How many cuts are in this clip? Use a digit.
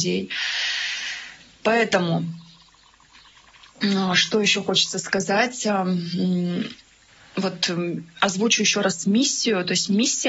0